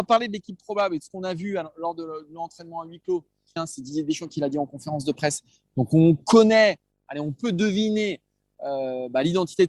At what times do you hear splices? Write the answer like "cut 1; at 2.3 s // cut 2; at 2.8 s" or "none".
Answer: cut 1; at 3.6 s